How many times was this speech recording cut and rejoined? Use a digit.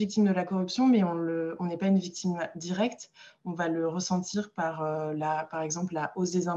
0